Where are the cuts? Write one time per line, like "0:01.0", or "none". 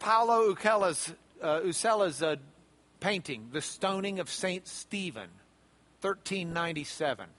none